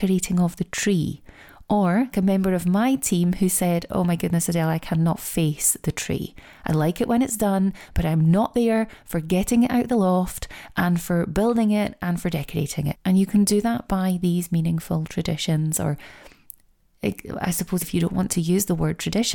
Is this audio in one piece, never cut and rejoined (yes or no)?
no